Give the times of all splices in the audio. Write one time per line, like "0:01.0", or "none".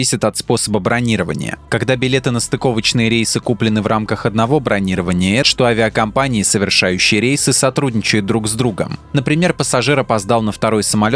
0:05.4